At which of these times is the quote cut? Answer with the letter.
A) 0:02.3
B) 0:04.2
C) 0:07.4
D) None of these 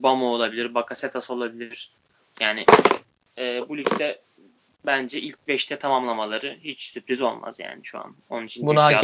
A